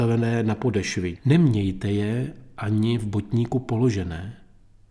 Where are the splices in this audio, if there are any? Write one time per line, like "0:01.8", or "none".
0:01.2